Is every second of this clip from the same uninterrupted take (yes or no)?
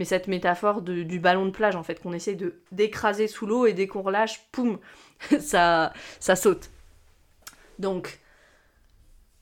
yes